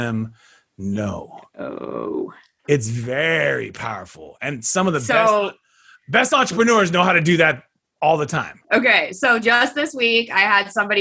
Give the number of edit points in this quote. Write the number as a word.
one